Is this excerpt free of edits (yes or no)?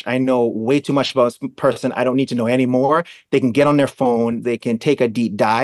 no